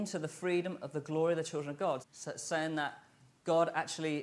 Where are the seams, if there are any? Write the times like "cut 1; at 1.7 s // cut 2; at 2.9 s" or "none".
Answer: cut 1; at 2.0 s

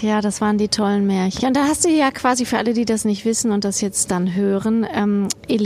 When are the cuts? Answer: cut 1; at 1.4 s

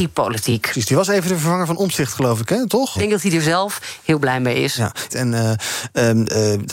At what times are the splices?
cut 1; at 3.0 s // cut 2; at 5.1 s

